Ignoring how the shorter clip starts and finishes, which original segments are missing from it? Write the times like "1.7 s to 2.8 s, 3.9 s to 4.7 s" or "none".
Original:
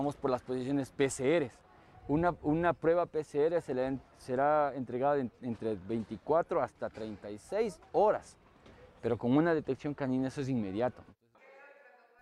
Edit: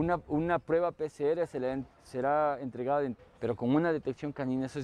5.3 s to 8.8 s